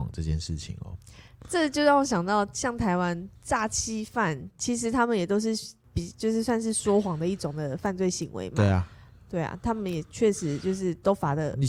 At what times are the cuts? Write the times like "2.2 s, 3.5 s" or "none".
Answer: none